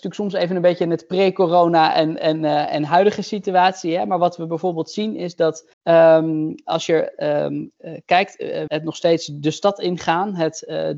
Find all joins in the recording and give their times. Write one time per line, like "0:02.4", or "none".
0:05.7
0:08.7